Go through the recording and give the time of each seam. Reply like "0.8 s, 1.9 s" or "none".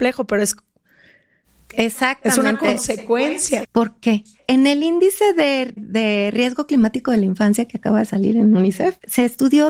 3.6 s, 5.8 s